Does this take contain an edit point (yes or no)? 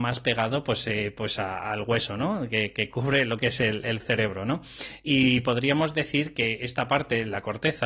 no